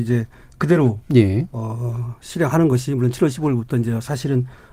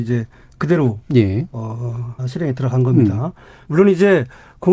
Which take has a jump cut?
second; 2 cuts; at 2.2 s, 3.6 s

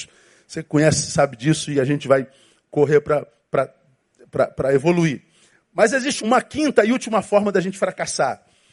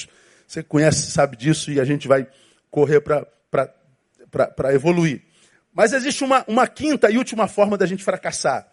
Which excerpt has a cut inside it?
first; 1 cut; at 6.2 s

